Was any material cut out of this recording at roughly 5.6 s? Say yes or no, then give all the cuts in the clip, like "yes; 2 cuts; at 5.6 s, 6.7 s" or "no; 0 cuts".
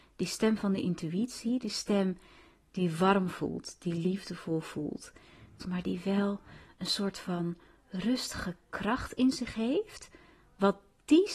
yes; 1 cut; at 5.6 s